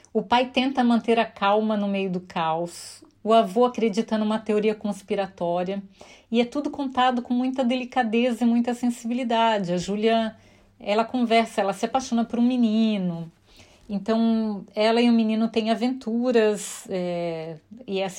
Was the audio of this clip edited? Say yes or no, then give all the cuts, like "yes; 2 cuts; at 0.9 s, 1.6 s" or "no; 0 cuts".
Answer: no; 0 cuts